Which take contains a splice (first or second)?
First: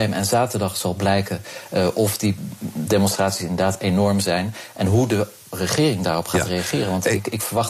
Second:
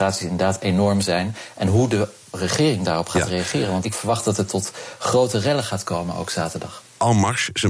second